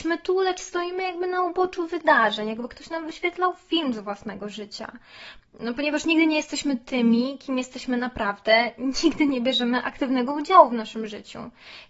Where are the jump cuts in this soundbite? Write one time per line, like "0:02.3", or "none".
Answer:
0:05.4